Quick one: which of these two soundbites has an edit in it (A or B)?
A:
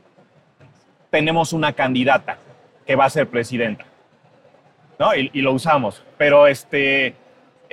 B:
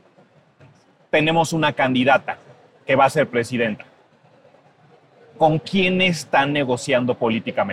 A